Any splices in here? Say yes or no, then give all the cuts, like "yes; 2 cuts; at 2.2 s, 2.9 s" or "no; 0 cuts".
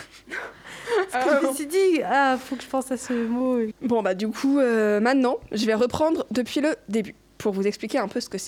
yes; 1 cut; at 3.7 s